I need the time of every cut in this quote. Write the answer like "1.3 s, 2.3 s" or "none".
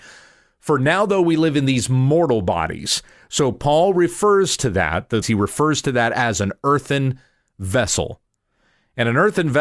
5.2 s